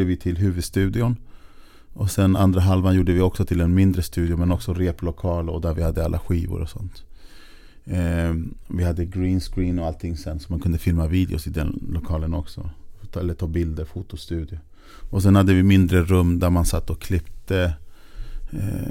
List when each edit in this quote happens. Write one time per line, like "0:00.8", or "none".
none